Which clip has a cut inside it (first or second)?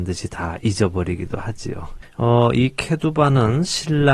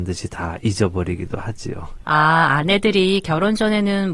first